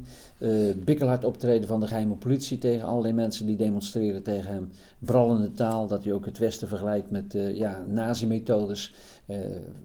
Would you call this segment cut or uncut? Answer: uncut